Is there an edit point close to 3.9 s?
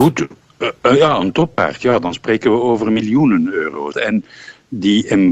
yes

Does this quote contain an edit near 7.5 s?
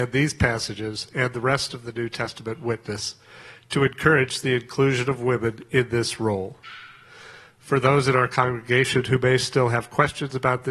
no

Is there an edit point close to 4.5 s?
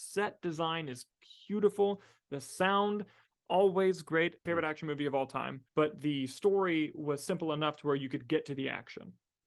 yes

